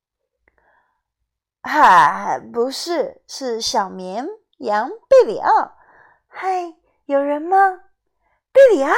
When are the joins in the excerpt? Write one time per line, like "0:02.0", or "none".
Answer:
none